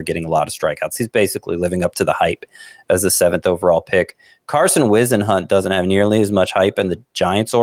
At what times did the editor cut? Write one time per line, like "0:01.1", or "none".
none